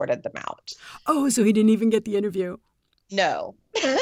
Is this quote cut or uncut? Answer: uncut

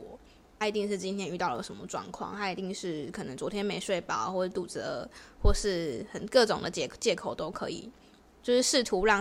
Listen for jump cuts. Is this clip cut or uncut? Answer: uncut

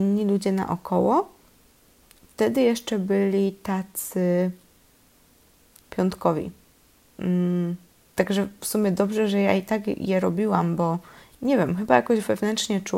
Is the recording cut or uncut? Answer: cut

